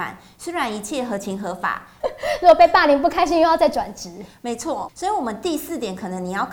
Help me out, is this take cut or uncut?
cut